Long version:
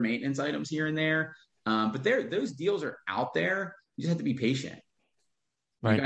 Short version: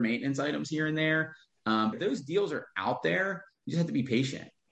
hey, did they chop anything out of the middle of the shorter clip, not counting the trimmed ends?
yes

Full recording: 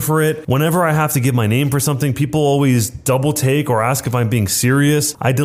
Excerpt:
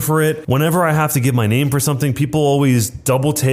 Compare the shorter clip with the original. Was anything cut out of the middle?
no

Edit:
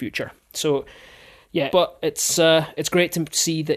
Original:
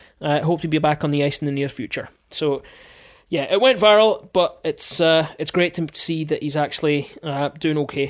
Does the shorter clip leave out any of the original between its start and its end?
yes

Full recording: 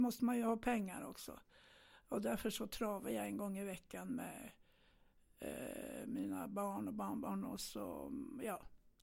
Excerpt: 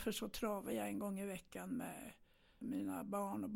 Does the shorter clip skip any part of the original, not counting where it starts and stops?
yes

